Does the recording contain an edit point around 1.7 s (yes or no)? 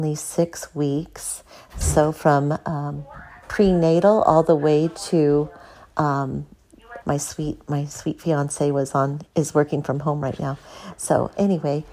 yes